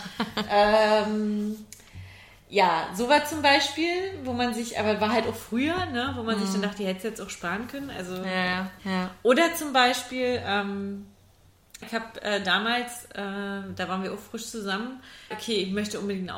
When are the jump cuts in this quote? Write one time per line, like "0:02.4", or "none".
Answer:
0:08.8
0:11.8
0:15.3